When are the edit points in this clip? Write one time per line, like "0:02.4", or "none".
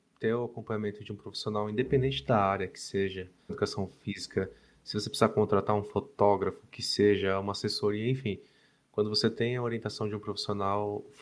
0:03.5

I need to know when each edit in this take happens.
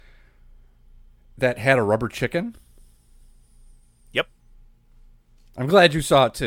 none

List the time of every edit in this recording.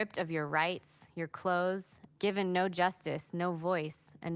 0:02.1

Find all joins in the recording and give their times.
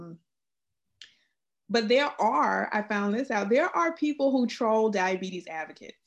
none

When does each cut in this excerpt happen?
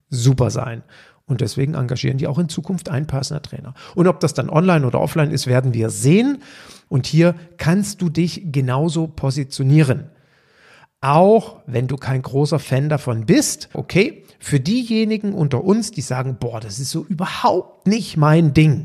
0:06.9
0:13.7

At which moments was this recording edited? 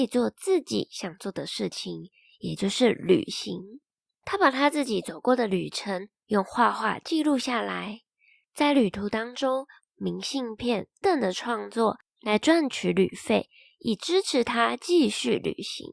0:09.8
0:11.0

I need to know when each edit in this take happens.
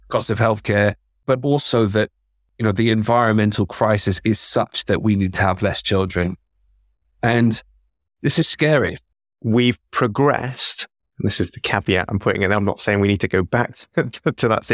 0:09.3

